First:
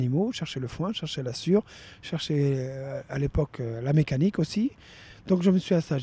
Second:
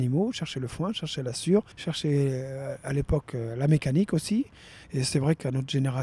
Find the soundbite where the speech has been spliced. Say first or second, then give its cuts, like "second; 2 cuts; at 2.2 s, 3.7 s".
second; 2 cuts; at 1.7 s, 4.8 s